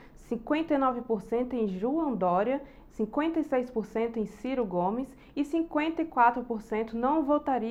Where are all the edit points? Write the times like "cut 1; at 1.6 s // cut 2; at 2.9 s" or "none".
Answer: none